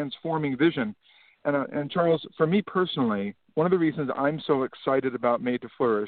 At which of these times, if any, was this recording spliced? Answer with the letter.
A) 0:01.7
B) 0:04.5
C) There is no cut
A